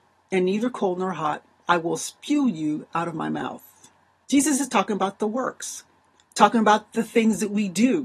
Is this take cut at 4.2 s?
yes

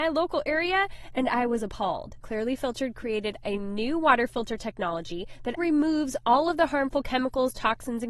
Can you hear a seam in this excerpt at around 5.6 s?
yes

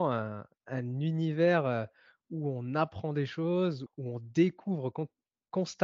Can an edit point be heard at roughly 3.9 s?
yes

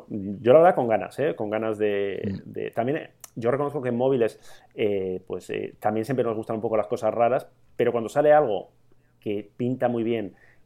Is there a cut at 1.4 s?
no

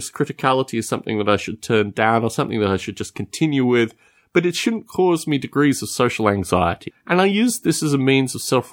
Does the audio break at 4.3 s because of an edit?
no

